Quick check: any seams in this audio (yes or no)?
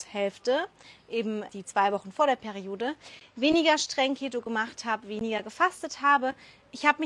yes